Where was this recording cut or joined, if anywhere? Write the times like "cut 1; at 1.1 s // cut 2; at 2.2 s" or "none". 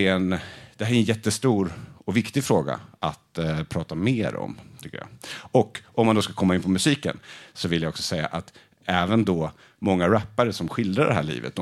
none